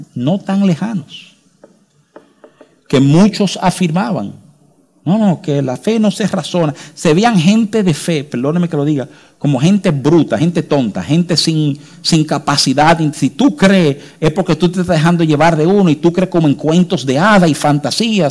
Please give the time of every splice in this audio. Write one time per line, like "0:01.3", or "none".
none